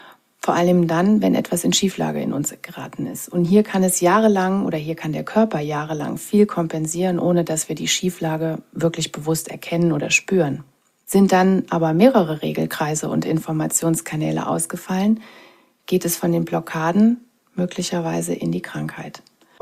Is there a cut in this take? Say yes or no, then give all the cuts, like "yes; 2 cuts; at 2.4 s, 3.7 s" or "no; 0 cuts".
no; 0 cuts